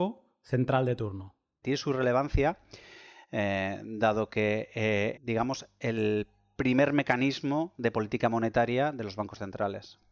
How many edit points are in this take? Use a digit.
2